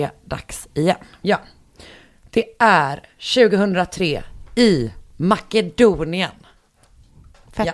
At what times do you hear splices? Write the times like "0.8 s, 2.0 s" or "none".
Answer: 1.2 s